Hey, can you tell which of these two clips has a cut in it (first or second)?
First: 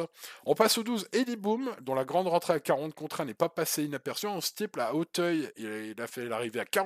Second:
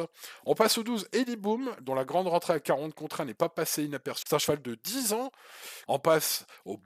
second